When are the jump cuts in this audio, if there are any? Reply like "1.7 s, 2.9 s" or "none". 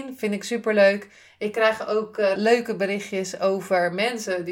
2.4 s